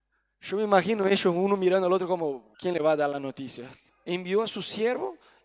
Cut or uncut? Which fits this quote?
cut